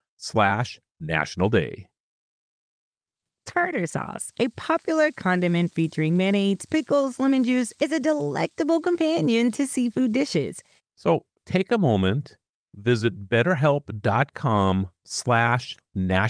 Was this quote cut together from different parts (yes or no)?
yes